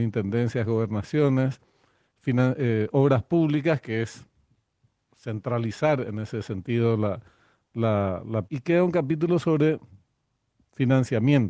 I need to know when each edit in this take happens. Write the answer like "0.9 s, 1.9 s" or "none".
8.5 s